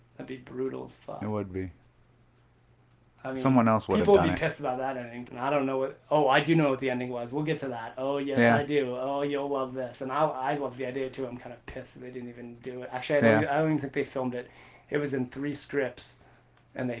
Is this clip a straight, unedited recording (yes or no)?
no